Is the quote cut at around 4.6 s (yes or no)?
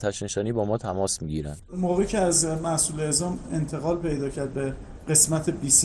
no